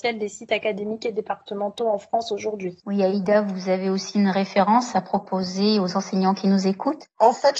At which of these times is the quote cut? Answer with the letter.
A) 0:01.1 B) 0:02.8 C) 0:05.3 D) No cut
B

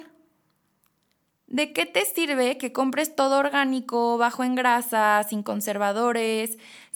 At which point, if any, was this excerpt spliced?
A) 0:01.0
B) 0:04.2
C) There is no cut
C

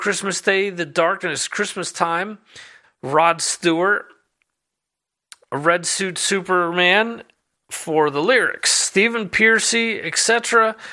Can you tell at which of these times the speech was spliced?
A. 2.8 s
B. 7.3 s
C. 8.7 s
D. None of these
A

